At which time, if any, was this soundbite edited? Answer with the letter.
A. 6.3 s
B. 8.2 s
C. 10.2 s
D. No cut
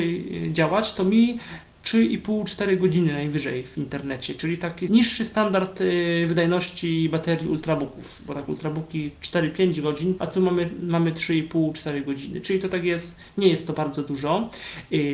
C